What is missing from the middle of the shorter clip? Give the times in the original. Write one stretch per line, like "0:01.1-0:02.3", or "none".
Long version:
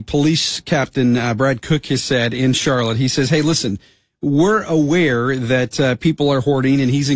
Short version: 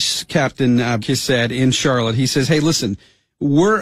0:01.4-0:01.8